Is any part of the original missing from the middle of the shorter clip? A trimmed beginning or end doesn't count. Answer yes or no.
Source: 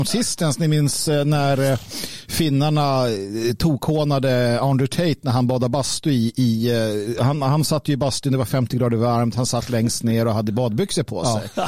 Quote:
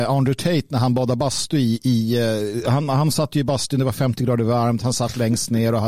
no